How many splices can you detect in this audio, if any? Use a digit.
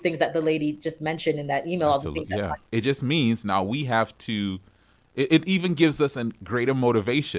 1